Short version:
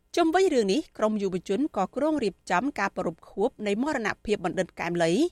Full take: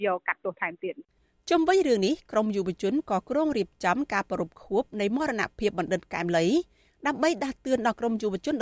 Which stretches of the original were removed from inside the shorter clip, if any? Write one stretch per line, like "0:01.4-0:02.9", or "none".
none

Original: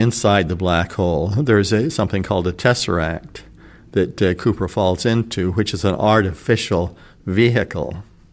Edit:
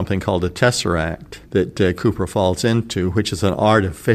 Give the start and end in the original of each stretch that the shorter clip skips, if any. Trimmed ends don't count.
0:03.5-0:03.9

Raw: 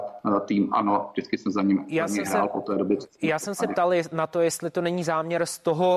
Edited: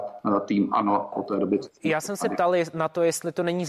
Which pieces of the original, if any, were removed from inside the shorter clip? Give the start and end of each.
0:01.1-0:02.5

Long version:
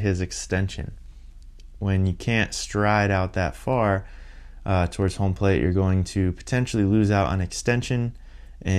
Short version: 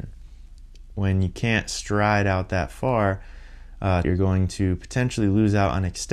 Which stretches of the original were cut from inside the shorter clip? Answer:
0:04.9-0:05.6

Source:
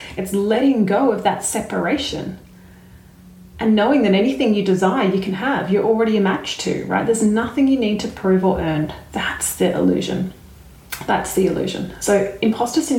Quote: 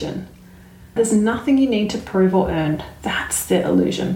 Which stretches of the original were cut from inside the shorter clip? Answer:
0:03.1-0:07.1

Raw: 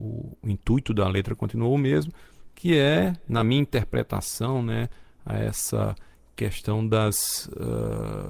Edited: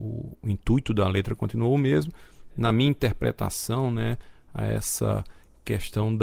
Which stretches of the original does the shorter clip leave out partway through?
0:02.5-0:03.2

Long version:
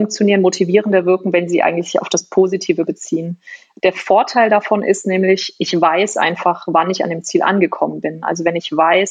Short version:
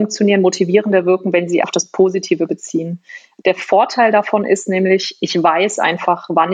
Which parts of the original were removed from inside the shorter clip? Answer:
0:01.6-0:02.0

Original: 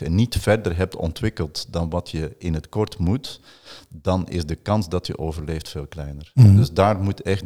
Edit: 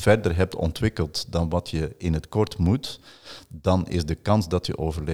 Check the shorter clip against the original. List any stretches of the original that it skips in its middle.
none

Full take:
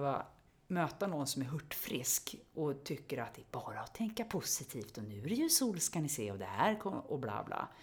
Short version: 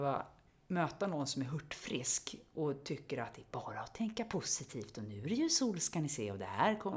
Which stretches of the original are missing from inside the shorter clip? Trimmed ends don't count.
none

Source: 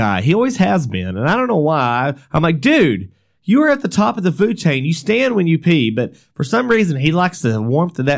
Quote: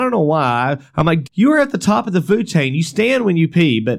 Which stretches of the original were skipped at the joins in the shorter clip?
0:02.6-0:03.3

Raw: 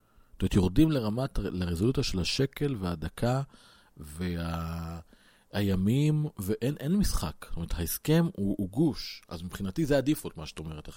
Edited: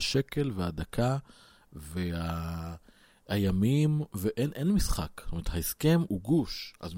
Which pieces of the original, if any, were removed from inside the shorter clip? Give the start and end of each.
0:08.3-0:08.6

